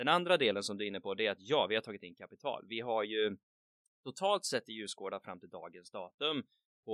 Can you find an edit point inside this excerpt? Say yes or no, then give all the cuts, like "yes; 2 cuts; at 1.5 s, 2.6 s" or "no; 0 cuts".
no; 0 cuts